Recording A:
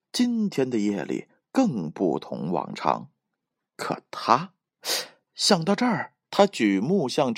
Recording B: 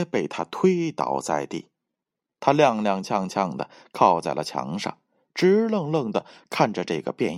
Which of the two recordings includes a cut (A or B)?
A